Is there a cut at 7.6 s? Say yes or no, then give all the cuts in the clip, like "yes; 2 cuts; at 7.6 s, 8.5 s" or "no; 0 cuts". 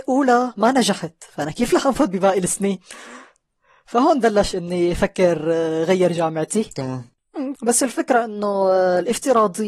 yes; 1 cut; at 7.6 s